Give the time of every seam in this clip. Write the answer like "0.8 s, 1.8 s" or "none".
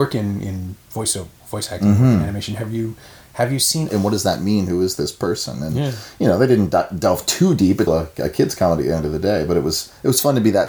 3.9 s, 7.9 s

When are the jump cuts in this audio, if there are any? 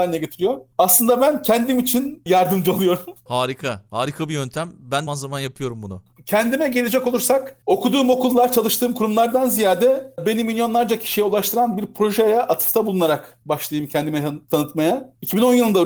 5.1 s

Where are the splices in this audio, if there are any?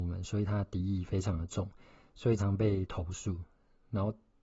2.4 s

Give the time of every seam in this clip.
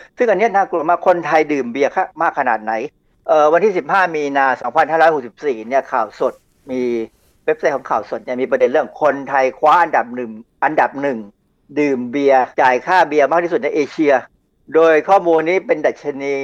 12.5 s

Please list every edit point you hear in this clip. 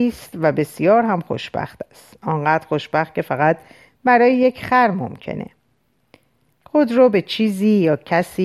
6.5 s

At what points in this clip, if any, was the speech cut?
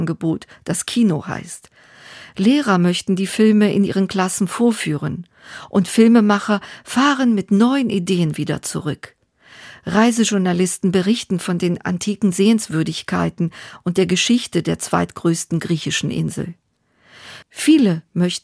17.4 s

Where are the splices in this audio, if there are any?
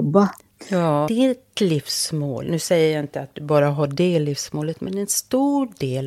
1.1 s

